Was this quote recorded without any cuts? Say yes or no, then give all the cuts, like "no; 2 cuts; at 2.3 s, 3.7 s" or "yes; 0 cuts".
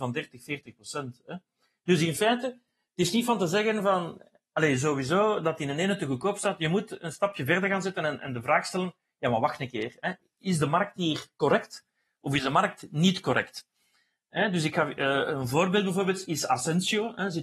yes; 0 cuts